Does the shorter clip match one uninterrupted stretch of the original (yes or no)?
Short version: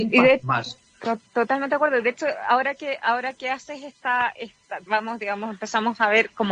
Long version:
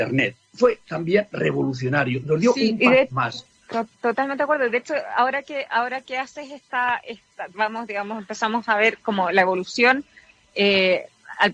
yes